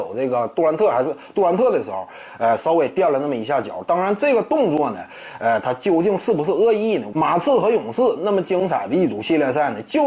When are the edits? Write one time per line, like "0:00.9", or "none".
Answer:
0:07.1